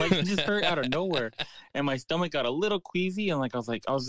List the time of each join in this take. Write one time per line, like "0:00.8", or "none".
none